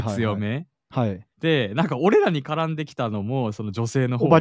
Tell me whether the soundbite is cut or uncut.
cut